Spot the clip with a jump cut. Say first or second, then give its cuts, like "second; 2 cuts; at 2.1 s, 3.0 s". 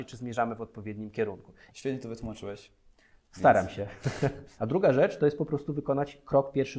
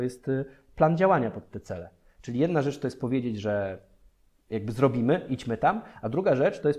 first; 2 cuts; at 1.7 s, 4.6 s